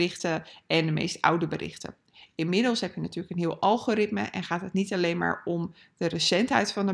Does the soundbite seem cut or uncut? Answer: uncut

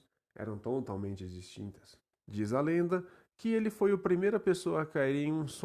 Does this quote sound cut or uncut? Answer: cut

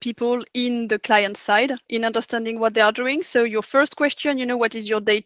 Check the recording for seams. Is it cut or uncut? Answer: uncut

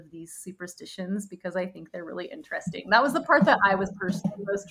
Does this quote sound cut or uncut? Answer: uncut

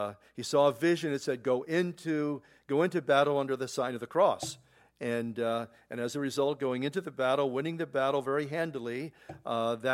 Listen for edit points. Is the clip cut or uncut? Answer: uncut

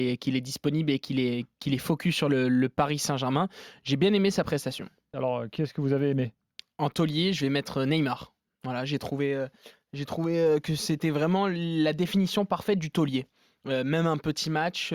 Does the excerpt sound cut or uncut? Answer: cut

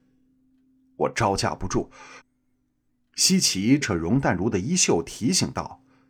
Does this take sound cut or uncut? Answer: cut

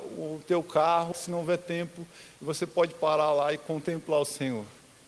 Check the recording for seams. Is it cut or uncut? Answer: cut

